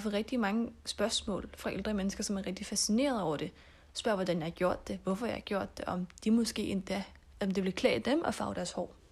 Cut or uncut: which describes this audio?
uncut